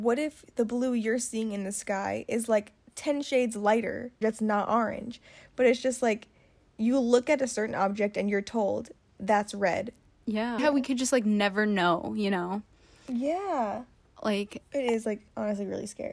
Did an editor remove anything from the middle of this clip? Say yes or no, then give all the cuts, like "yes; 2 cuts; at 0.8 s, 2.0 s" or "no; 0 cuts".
yes; 2 cuts; at 4.2 s, 10.6 s